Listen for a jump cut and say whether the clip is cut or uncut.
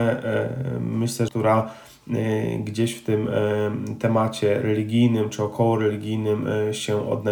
cut